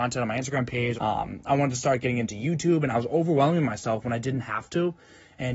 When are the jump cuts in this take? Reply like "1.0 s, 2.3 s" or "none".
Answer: 0.9 s